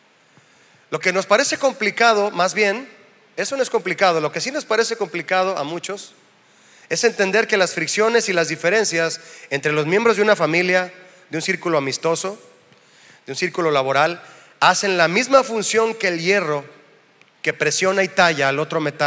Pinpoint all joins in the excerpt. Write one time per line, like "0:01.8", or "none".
none